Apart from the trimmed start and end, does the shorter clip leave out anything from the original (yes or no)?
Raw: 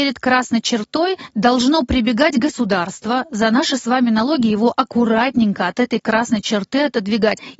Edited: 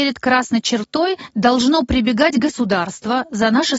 no